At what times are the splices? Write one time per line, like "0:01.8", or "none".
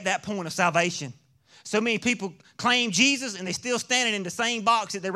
none